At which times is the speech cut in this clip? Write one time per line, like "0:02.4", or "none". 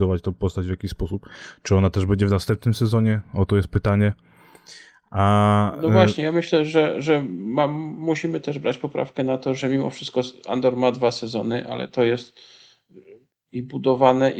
0:09.6